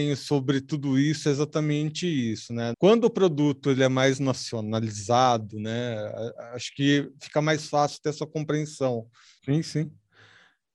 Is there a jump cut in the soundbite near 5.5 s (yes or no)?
no